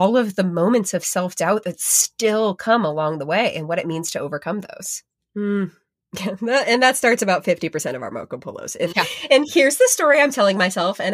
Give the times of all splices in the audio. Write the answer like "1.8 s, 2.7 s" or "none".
5.2 s, 8.9 s